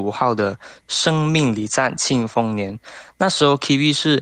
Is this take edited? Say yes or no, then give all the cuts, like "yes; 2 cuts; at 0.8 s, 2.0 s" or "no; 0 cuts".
no; 0 cuts